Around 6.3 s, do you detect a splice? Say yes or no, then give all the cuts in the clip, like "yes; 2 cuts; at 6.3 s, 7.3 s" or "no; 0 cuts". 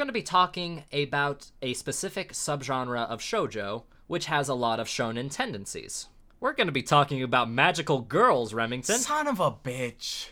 yes; 1 cut; at 6.3 s